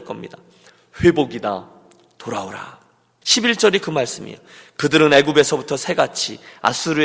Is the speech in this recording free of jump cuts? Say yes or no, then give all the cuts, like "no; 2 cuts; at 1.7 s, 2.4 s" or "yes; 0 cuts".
no; 1 cut; at 3.2 s